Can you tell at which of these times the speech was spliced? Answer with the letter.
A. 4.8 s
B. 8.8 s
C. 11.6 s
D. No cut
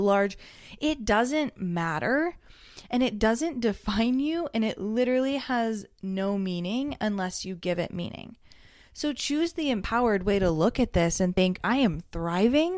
C